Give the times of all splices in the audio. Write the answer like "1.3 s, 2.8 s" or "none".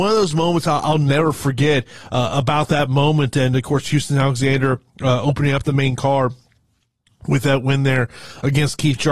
none